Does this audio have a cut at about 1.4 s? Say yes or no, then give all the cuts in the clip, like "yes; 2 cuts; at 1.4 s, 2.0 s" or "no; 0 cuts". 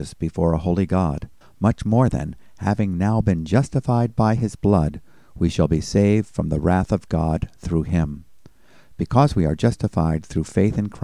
yes; 1 cut; at 1.4 s